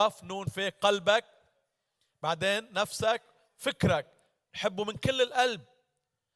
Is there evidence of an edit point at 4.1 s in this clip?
no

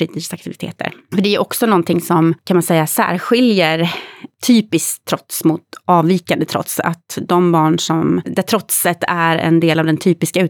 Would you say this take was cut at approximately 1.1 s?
no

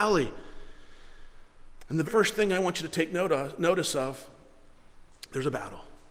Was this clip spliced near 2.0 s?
yes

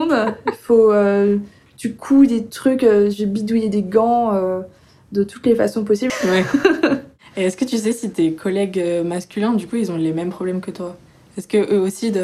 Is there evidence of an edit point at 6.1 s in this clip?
yes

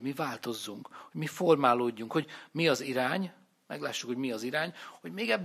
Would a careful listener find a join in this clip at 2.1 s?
yes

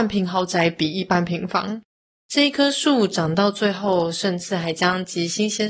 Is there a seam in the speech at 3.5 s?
no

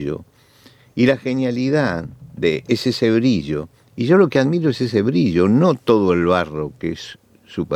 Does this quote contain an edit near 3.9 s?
no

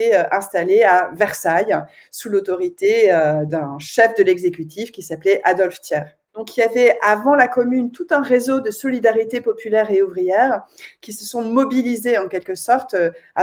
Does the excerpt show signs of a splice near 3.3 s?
no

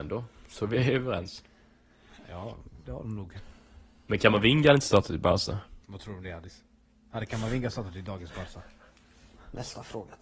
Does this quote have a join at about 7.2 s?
no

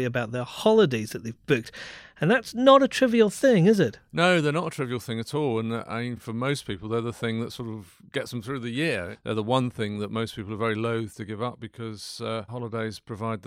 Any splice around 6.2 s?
no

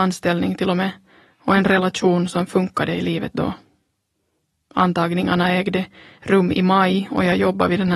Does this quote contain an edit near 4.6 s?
no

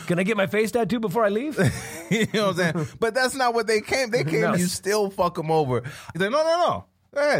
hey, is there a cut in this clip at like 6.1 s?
yes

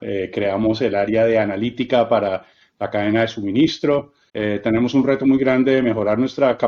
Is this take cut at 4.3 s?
yes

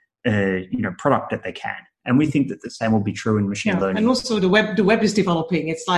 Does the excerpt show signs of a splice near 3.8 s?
no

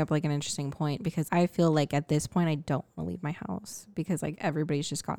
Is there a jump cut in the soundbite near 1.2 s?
yes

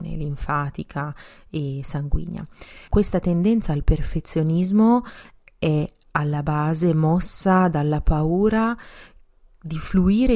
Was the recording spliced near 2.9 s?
yes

